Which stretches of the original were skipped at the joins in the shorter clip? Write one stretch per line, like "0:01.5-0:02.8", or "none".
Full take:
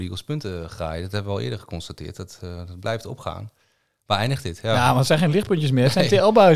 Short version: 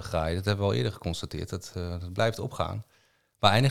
none